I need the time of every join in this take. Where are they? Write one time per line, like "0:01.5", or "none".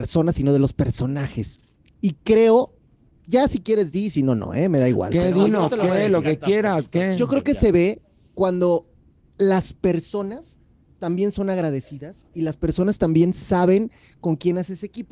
none